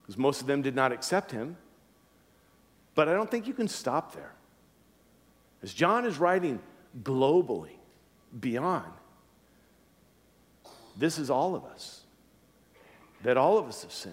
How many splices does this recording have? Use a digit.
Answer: 0